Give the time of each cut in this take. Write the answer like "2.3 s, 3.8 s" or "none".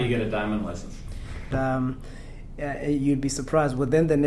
1.5 s